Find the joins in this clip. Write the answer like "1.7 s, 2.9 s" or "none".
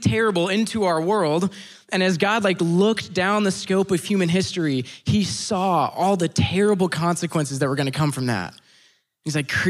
none